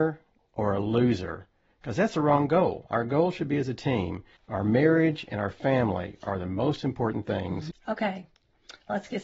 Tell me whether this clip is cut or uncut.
cut